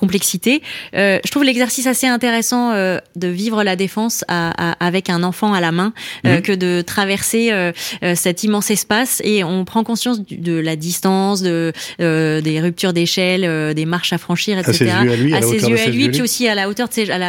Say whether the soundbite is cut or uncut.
uncut